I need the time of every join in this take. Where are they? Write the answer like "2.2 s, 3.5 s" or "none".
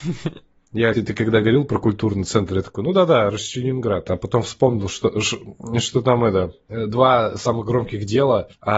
0.9 s